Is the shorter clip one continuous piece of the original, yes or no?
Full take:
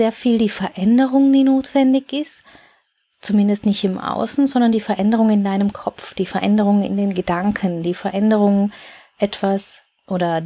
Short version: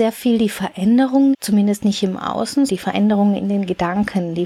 no